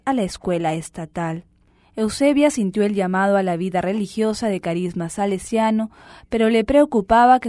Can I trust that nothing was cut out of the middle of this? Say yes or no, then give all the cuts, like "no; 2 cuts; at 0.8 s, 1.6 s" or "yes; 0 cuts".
yes; 0 cuts